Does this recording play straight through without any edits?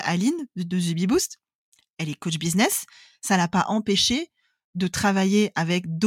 yes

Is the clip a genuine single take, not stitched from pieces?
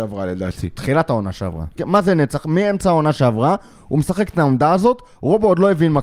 no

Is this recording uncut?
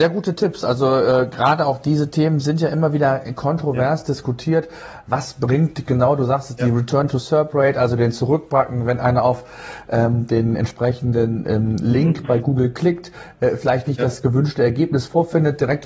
yes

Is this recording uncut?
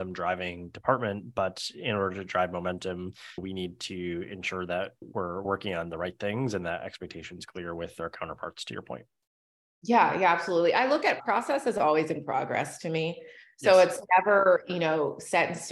yes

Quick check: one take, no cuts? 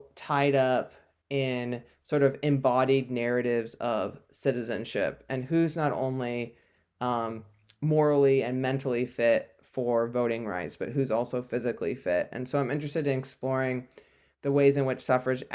yes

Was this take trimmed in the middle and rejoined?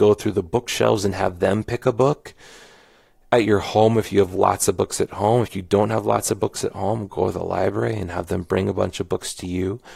no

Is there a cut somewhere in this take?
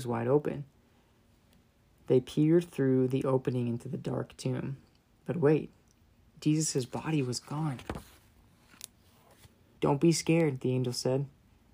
yes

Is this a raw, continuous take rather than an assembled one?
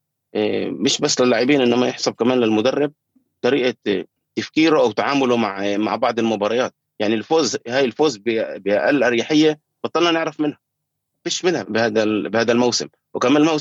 no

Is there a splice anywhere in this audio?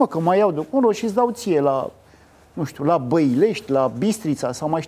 no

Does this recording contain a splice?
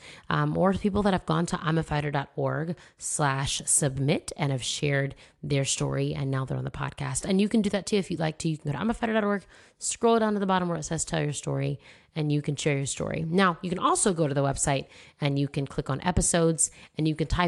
no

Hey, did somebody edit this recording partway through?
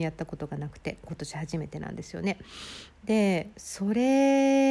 no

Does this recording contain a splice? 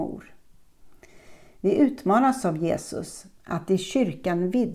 no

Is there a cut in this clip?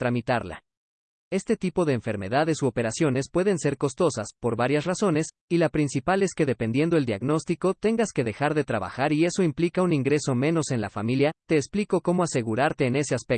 yes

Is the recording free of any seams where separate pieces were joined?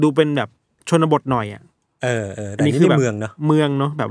yes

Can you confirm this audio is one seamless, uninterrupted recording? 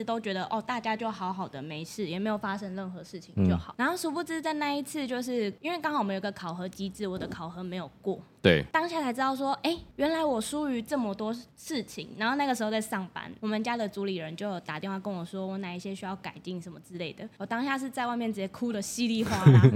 yes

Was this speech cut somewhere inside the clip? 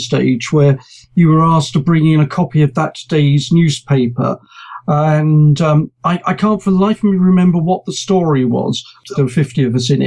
yes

